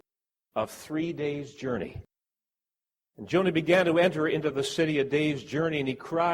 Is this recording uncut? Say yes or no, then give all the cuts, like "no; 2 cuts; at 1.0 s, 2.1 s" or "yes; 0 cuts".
yes; 0 cuts